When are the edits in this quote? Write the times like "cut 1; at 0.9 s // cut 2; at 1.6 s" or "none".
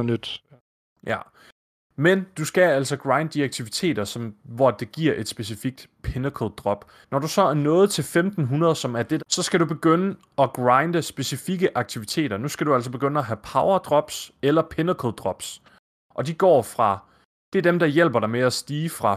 cut 1; at 7.0 s // cut 2; at 9.2 s